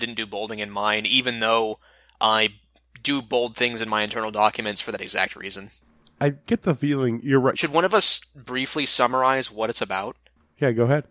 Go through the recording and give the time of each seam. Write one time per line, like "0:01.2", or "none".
0:07.5